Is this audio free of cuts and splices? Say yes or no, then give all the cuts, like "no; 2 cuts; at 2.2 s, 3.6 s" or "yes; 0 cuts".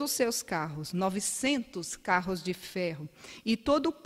yes; 0 cuts